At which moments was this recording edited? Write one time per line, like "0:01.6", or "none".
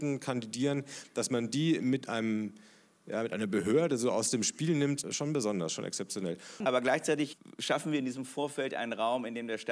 0:05.0
0:06.6